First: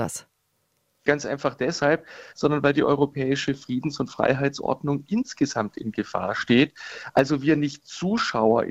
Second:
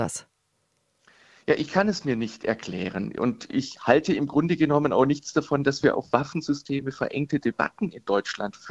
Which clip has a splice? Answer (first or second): first